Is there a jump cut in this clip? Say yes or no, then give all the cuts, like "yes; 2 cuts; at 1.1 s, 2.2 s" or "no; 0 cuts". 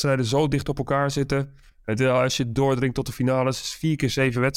no; 0 cuts